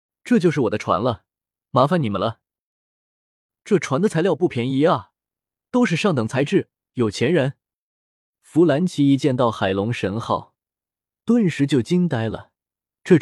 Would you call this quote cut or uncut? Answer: uncut